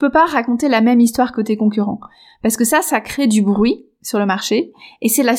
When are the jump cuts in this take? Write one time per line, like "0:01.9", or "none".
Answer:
none